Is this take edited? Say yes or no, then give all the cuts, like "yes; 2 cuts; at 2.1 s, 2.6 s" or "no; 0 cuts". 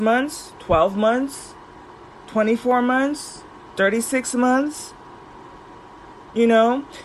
no; 0 cuts